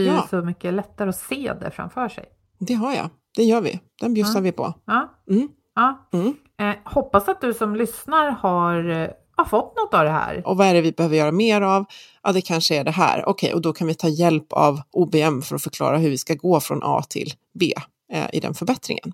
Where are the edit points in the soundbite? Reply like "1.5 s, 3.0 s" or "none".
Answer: 6.1 s, 10.4 s